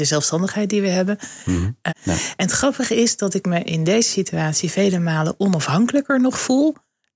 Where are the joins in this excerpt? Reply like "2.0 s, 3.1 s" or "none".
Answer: 1.9 s

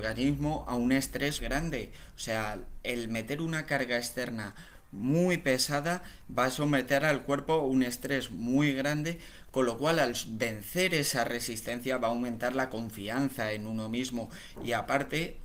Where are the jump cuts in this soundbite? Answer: 1.4 s

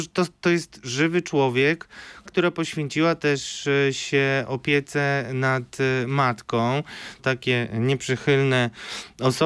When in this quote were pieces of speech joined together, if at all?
2.3 s, 7.2 s

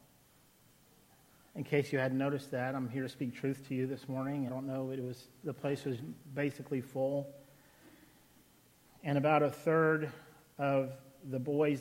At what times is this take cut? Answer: 4.5 s

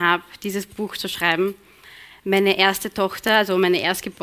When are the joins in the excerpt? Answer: none

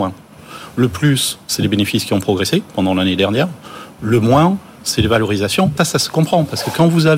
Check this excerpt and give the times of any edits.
5.8 s

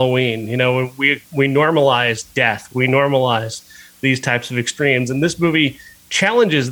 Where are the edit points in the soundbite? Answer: none

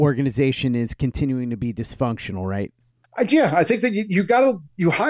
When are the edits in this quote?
none

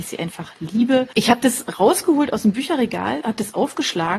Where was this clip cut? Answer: 1.1 s

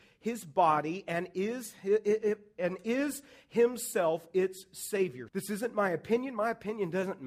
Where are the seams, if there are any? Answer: 5.3 s

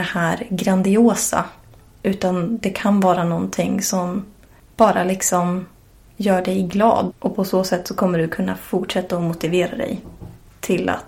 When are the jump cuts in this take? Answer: 7.1 s

